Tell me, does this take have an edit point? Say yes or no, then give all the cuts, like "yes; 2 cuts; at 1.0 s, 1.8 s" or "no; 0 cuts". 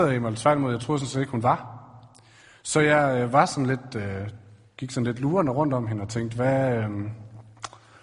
no; 0 cuts